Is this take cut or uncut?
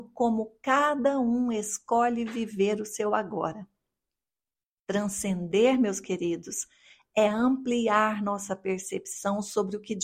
uncut